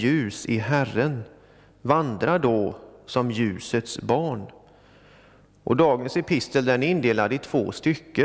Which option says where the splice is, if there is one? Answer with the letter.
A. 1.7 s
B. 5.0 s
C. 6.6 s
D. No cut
D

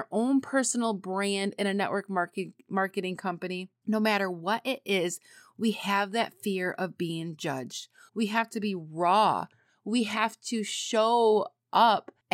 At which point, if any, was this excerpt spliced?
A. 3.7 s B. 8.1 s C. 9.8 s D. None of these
B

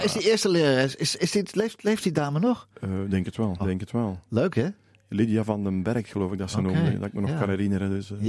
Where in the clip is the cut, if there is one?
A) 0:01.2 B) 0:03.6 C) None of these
B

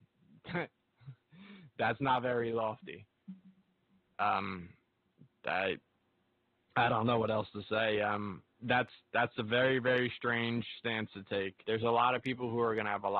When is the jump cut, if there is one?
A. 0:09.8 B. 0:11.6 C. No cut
B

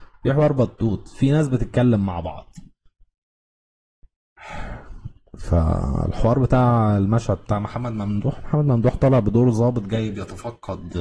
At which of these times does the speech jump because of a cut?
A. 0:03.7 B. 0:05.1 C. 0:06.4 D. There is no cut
D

